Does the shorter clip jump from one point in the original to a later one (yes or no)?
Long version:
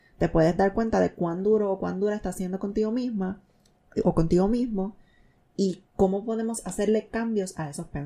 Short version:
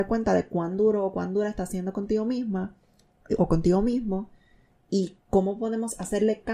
no